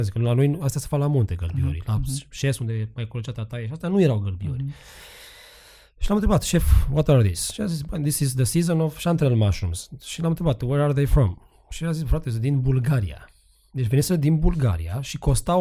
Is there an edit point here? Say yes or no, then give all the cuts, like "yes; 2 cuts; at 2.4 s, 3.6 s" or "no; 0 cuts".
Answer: no; 0 cuts